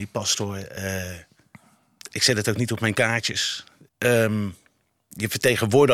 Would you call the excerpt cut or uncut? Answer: cut